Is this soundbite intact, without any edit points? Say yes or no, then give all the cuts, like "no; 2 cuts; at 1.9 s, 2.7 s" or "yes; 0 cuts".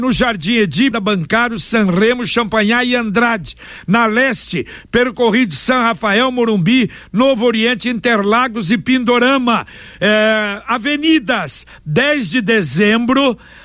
no; 1 cut; at 0.9 s